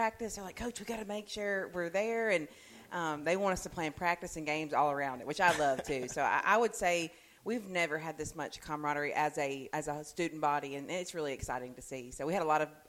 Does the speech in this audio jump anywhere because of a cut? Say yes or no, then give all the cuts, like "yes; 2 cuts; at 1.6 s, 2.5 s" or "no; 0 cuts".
yes; 1 cut; at 9.7 s